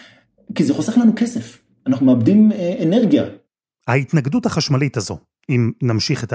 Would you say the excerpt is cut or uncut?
uncut